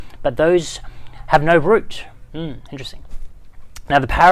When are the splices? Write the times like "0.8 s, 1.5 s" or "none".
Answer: 2.3 s